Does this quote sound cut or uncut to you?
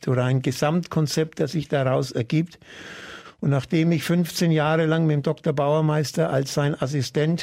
uncut